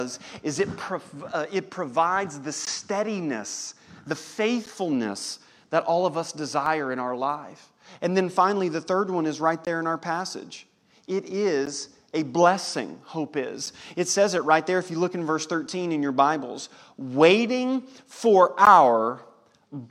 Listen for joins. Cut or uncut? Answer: uncut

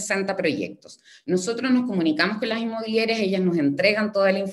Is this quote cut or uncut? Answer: uncut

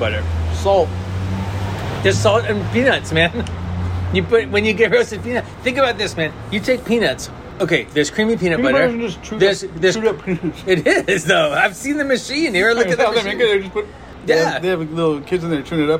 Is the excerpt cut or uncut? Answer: uncut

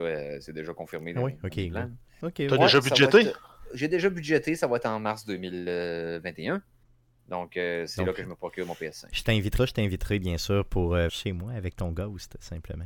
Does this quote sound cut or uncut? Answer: cut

